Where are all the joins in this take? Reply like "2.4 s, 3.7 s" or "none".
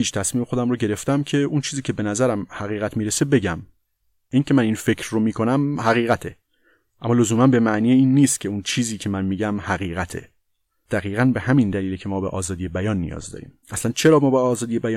13.6 s